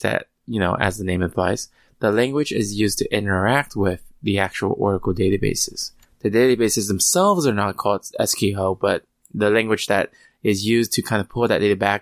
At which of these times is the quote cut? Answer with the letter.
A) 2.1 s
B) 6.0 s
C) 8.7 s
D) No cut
D